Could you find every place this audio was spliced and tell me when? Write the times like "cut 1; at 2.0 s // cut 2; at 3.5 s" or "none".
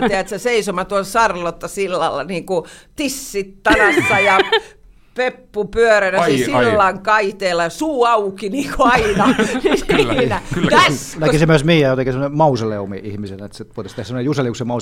cut 1; at 11.1 s